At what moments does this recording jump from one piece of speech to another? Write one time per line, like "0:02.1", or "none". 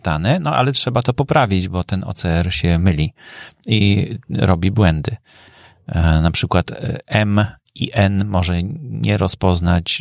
none